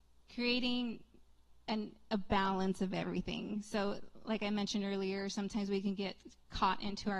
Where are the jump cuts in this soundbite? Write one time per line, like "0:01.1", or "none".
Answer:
none